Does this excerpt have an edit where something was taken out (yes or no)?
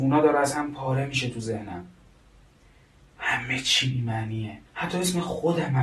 yes